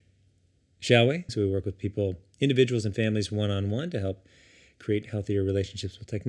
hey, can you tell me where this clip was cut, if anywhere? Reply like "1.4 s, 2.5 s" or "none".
1.3 s